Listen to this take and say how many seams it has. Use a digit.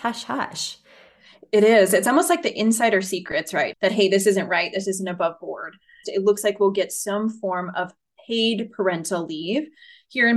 2